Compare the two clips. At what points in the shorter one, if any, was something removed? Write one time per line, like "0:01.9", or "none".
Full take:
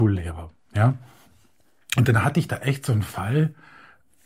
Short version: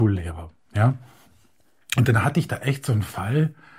none